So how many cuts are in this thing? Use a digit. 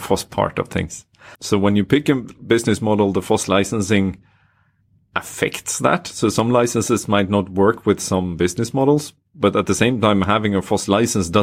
1